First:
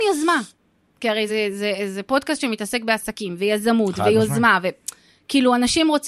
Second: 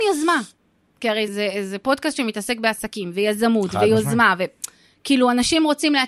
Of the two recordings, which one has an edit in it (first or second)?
second